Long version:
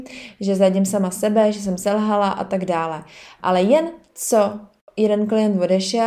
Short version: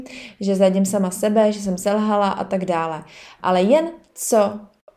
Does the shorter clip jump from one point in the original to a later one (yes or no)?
no